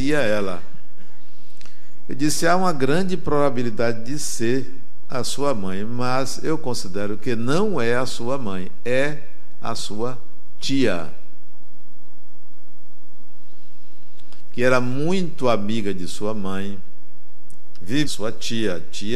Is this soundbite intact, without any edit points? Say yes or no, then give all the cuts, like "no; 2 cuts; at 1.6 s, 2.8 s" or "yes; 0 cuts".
no; 1 cut; at 18.0 s